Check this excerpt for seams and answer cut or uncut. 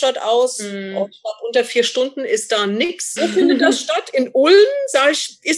cut